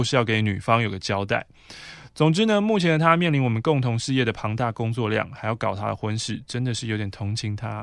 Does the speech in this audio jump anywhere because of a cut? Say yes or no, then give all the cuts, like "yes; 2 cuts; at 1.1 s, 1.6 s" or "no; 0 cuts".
no; 0 cuts